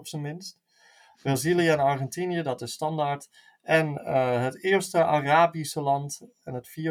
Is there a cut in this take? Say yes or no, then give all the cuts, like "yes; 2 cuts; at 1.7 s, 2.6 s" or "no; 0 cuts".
no; 0 cuts